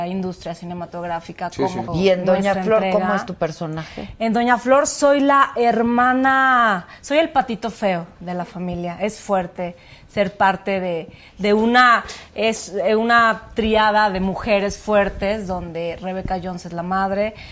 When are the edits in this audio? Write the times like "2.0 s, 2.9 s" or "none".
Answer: 1.9 s